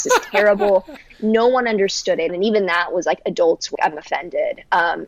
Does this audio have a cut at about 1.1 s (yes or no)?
no